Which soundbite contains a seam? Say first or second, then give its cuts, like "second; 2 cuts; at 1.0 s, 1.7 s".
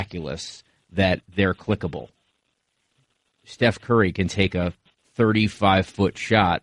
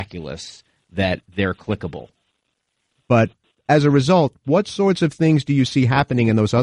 second; 1 cut; at 3.0 s